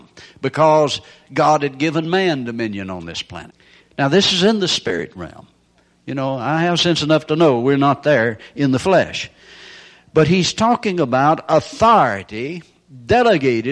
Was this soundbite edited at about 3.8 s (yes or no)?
yes